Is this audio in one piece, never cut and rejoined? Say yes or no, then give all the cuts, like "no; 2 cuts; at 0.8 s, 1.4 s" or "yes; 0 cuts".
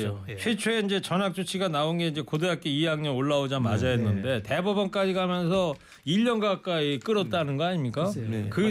yes; 0 cuts